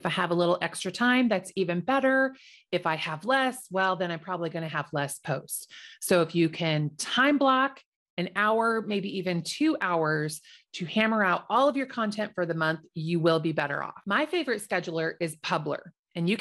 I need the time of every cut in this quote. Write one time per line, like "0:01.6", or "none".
none